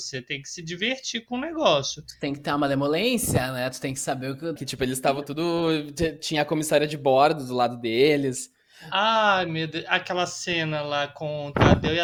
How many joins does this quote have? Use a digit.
1